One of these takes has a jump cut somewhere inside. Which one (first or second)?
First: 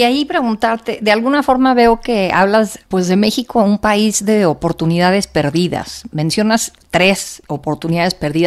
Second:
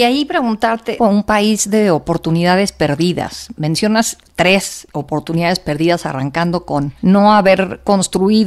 second